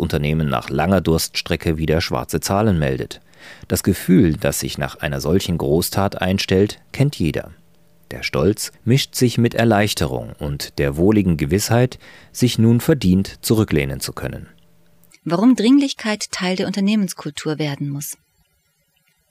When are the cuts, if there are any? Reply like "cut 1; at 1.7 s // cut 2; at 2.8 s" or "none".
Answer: cut 1; at 8.7 s // cut 2; at 15.1 s

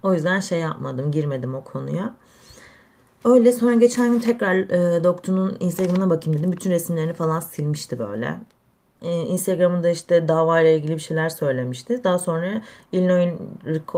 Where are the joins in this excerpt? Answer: cut 1; at 9.0 s

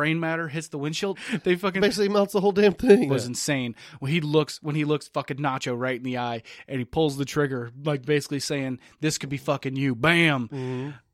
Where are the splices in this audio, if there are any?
cut 1; at 1.1 s // cut 2; at 3.1 s

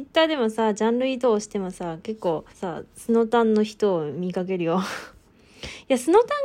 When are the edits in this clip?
cut 1; at 2.5 s

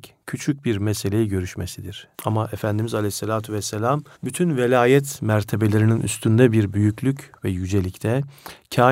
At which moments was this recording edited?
cut 1; at 2.1 s // cut 2; at 4.1 s

